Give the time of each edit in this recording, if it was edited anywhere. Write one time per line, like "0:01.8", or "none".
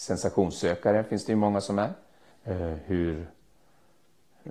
0:02.3